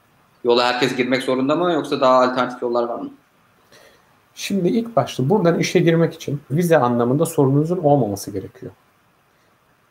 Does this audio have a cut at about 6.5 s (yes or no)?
yes